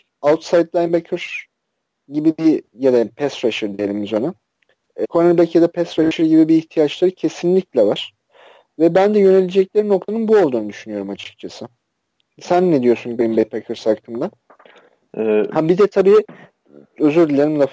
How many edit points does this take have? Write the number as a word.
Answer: one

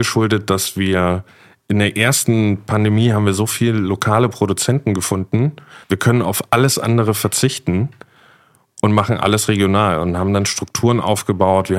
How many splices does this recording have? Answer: one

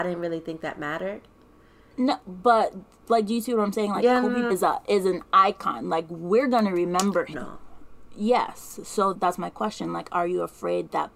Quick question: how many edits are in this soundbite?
three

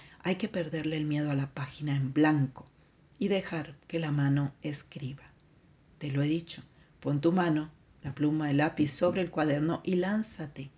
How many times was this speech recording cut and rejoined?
zero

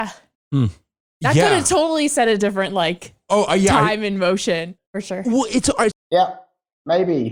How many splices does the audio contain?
two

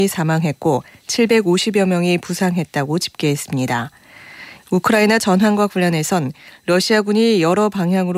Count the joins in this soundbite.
one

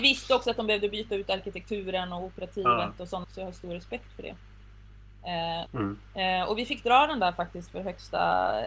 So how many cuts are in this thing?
two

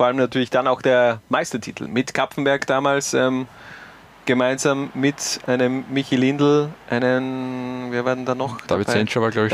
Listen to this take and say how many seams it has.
zero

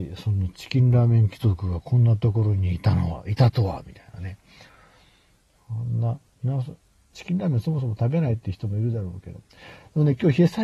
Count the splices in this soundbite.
one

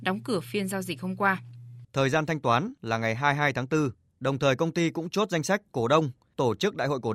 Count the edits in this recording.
one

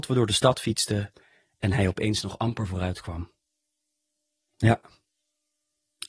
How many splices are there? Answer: one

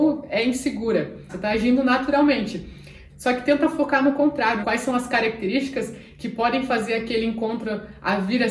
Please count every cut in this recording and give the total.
three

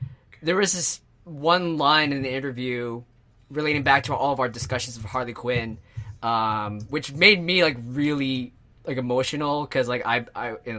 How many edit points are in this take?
zero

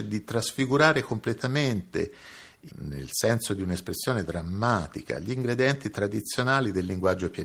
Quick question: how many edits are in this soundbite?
one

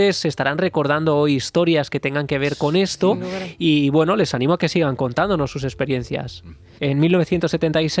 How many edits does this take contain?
one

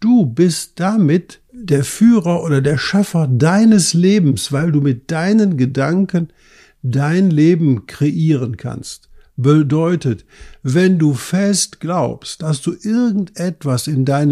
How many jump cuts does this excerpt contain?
zero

